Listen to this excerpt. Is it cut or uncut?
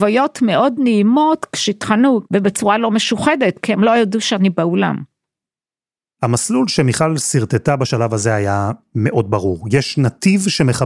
cut